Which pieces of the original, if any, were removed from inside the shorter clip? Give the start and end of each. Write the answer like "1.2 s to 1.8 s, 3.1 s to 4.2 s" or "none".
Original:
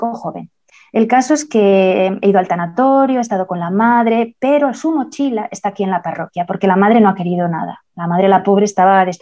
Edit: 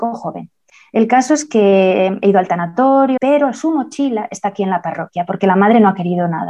3.2 s to 4.4 s